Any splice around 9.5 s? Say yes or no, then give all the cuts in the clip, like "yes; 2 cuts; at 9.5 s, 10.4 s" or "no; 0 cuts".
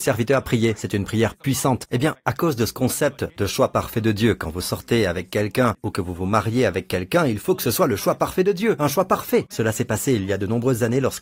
yes; 2 cuts; at 1.9 s, 9.5 s